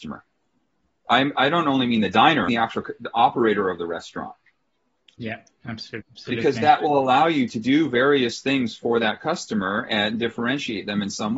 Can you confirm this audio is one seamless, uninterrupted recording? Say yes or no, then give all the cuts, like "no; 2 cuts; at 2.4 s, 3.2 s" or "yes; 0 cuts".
no; 1 cut; at 6.0 s